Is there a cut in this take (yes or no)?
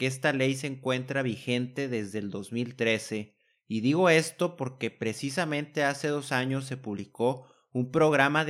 no